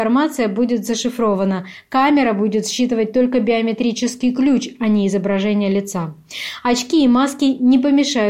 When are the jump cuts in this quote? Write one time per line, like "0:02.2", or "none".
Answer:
none